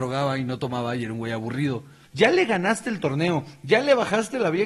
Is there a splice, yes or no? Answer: yes